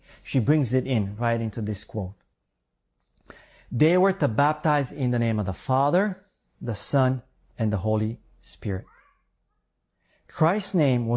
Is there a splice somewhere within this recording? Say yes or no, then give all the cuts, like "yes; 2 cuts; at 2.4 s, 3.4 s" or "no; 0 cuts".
no; 0 cuts